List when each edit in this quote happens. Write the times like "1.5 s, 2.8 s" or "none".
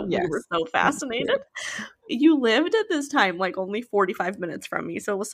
2.1 s